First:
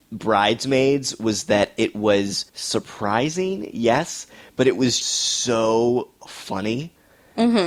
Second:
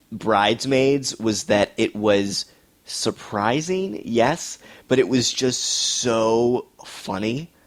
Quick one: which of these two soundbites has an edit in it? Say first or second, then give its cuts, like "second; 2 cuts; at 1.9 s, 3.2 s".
first; 2 cuts; at 2.5 s, 5.0 s